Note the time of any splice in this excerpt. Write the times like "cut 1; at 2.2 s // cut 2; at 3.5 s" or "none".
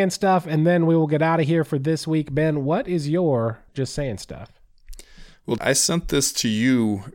cut 1; at 3.7 s // cut 2; at 5.6 s

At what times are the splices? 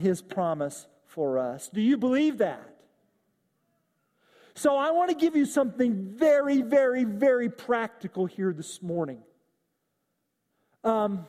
none

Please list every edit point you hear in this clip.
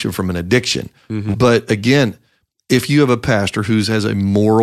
cut 1; at 1.3 s

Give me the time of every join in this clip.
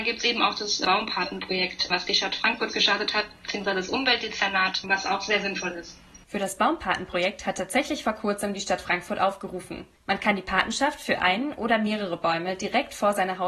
none

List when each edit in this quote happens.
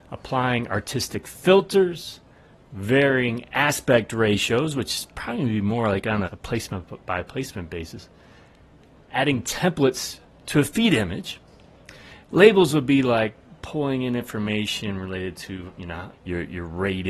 cut 1; at 6.2 s // cut 2; at 12.2 s // cut 3; at 16.1 s

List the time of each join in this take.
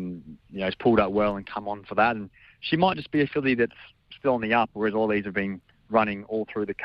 none

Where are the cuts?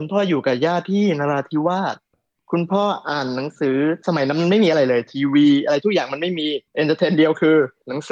cut 1; at 6.7 s

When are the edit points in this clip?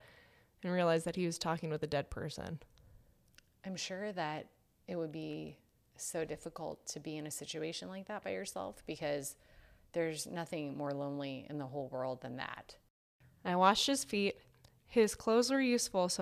none

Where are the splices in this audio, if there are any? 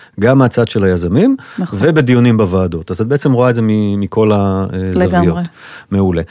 none

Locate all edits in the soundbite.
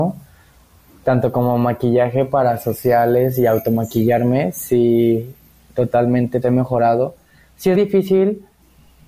cut 1; at 6.4 s // cut 2; at 7.7 s

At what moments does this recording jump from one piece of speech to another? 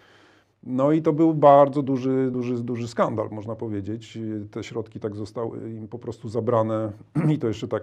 none

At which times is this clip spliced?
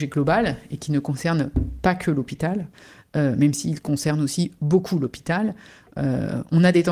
none

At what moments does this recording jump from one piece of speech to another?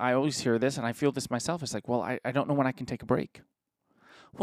none

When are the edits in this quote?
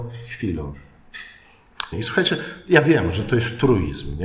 cut 1; at 1.9 s

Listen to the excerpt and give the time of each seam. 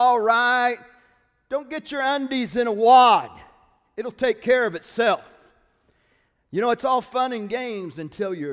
none

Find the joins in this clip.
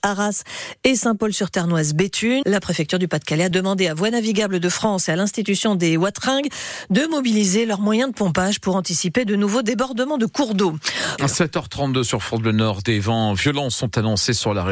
cut 1; at 2.4 s // cut 2; at 3.5 s // cut 3; at 11.2 s

